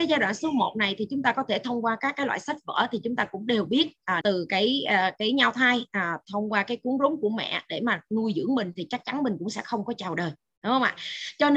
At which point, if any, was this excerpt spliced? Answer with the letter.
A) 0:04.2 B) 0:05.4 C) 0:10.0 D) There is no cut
A